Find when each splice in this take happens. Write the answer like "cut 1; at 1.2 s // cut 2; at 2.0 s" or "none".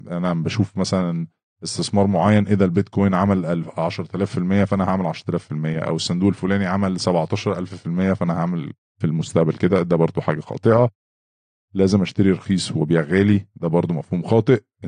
none

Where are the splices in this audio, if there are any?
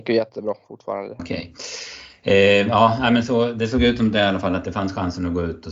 cut 1; at 1.2 s

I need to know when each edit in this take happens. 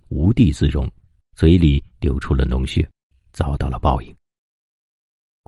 cut 1; at 1.2 s // cut 2; at 3.1 s

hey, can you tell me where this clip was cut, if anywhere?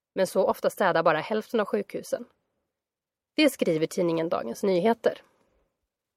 none

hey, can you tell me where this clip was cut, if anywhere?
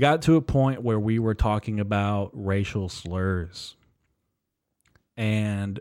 none

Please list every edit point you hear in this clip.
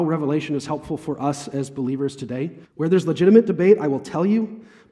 cut 1; at 2.6 s

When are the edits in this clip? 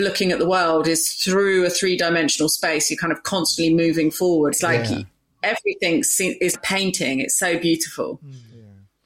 cut 1; at 4.5 s // cut 2; at 6.5 s

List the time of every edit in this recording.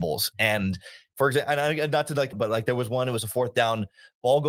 cut 1; at 2.3 s

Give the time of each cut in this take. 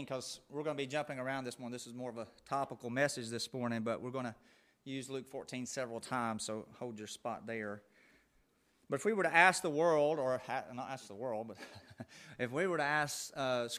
none

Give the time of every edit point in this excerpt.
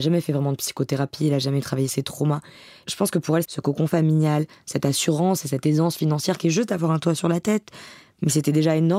cut 1; at 3.4 s

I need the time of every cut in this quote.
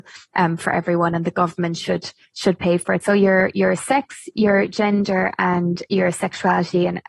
cut 1; at 3.0 s

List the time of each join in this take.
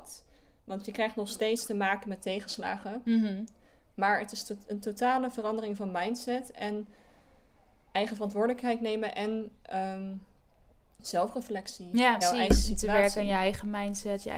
cut 1; at 9.6 s // cut 2; at 12.2 s

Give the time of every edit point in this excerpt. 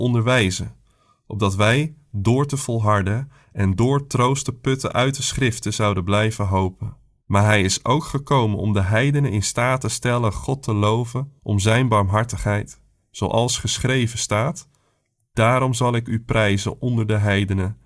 cut 1; at 7.2 s

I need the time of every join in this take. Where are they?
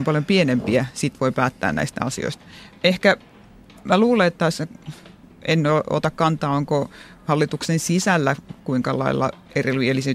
none

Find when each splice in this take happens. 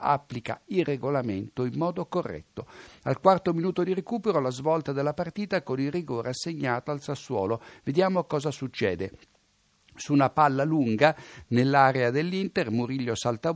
none

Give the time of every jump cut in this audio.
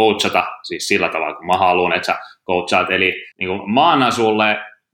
cut 1; at 3.3 s

